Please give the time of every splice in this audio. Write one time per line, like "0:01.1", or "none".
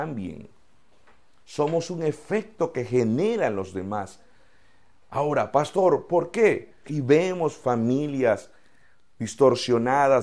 0:06.8

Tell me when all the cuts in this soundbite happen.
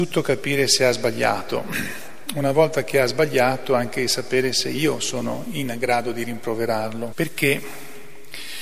0:07.1

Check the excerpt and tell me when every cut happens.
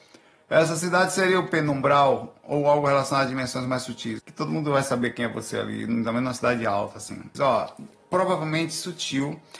0:04.2
0:07.3

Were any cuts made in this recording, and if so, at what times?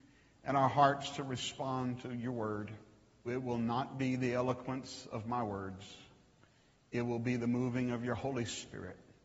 0:03.3

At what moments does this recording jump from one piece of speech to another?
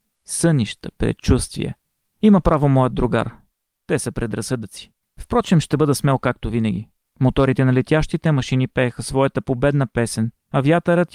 0:05.0
0:07.1

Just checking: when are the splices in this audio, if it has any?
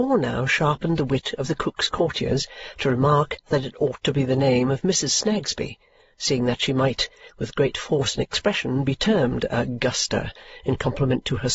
none

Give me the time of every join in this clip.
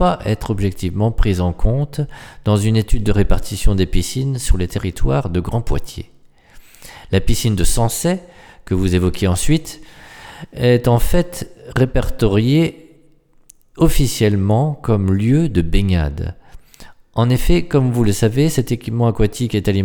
none

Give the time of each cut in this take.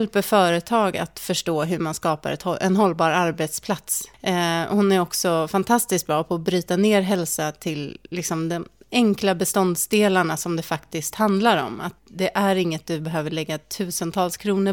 0:12.0

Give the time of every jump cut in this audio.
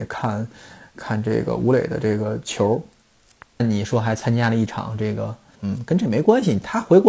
0:03.6
0:05.5

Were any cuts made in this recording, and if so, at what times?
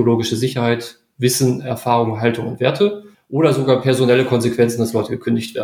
0:03.1

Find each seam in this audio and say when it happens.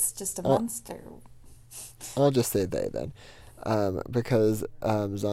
none

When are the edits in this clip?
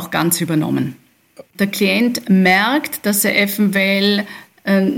0:01.5

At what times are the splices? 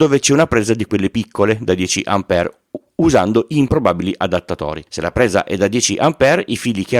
0:04.9

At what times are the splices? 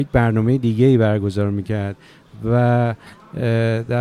none

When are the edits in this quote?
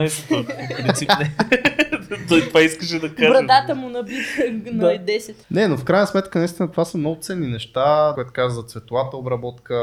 0:05.4
0:08.1

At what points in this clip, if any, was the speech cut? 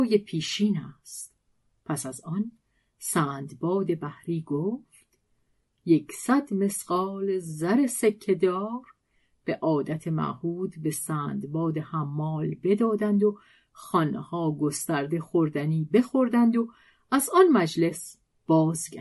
none

